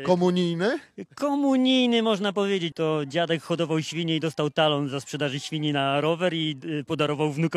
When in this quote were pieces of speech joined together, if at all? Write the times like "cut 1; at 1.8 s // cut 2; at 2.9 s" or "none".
cut 1; at 2.7 s